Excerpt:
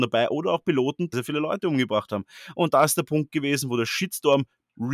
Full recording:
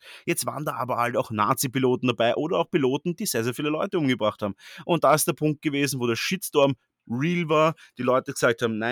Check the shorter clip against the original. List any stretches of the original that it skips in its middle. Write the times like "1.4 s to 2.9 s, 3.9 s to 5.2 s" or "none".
3.2 s to 3.4 s